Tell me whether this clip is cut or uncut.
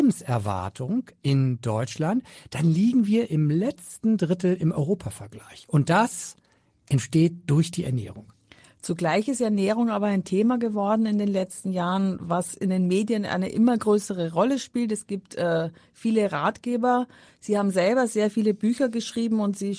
uncut